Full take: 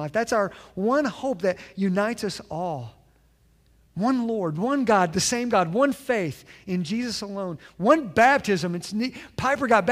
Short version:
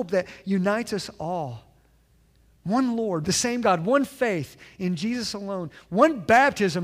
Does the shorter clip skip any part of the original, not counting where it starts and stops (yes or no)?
yes